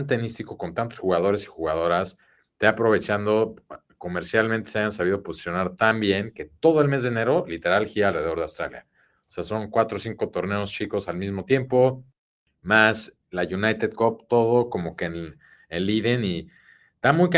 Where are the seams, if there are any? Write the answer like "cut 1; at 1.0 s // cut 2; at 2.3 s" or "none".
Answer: none